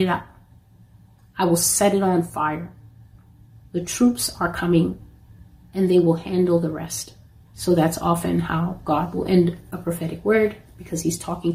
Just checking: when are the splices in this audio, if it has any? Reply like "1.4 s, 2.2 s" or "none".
7.5 s